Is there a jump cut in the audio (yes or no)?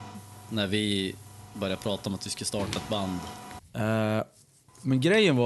yes